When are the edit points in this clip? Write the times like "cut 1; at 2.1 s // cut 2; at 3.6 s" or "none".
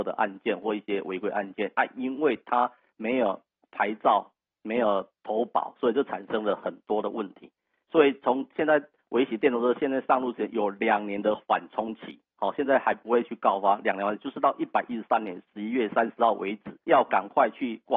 cut 1; at 16.8 s